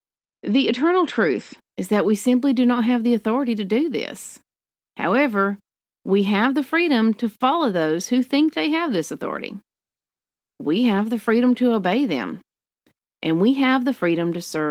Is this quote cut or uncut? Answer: uncut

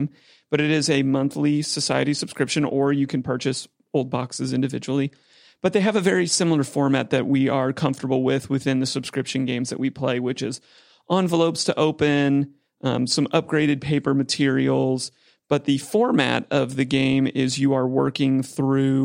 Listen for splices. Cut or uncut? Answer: uncut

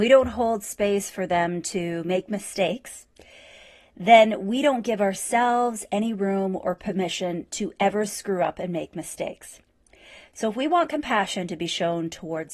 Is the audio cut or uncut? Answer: uncut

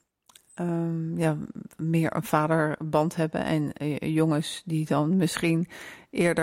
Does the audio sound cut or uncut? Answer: uncut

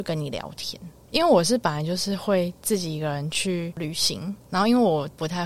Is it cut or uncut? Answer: uncut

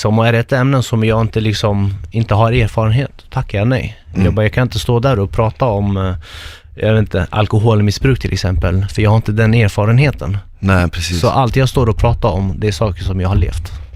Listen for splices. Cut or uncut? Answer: uncut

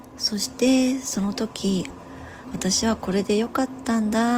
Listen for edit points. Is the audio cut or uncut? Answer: cut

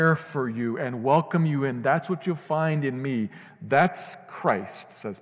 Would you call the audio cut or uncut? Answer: uncut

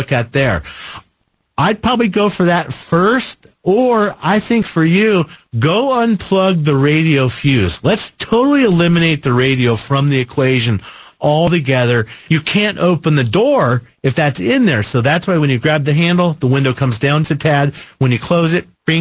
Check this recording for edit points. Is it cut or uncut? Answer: cut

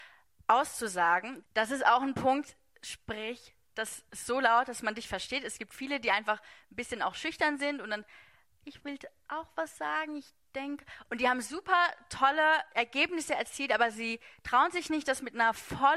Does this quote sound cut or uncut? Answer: cut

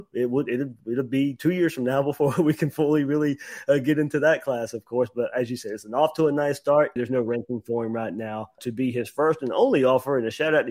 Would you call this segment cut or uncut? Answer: cut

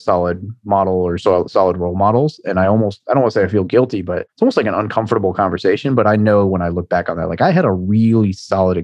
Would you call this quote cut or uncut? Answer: uncut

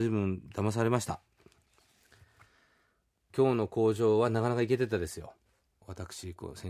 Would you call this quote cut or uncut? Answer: uncut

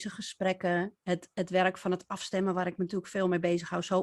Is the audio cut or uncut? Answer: uncut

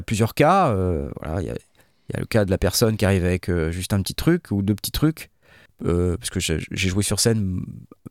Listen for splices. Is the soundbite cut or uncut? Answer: cut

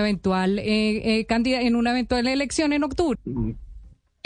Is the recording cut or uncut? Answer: cut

